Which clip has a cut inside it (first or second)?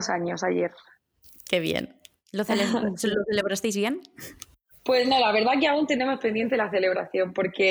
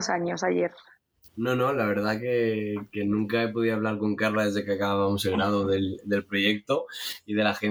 second